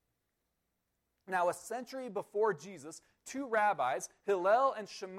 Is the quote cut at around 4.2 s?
no; 0 cuts

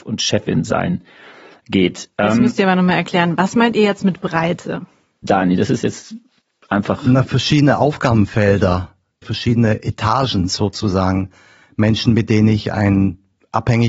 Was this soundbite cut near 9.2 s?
yes; 1 cut; at 9.2 s

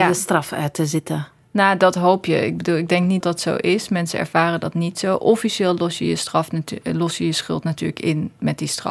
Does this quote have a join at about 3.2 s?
yes; 1 cut; at 3.2 s

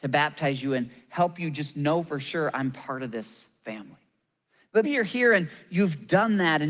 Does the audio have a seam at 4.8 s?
yes; 1 cut; at 4.8 s

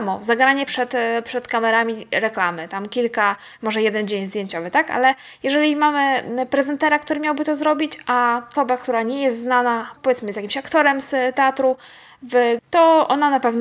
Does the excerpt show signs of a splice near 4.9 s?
no; 2 cuts; at 8.5 s, 12.6 s

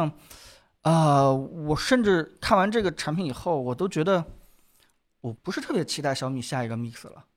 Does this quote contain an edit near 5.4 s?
yes; 1 cut; at 5.4 s

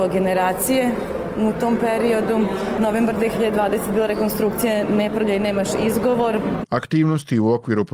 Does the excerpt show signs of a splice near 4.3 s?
no; 2 cuts; at 2.7 s, 6.6 s

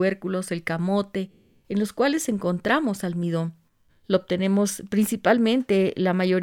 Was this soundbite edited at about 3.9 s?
yes; 1 cut; at 3.9 s

